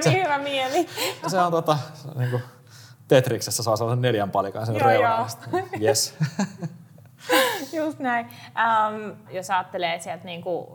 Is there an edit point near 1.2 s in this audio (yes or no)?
yes